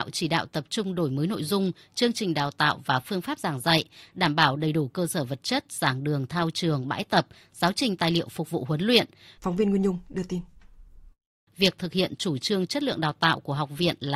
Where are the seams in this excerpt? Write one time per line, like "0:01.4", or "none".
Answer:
0:09.4
0:11.5